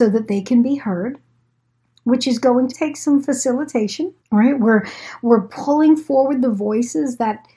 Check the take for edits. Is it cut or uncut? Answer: cut